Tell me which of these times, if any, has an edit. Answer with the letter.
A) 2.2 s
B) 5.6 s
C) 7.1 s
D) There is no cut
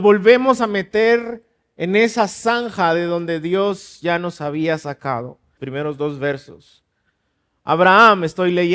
B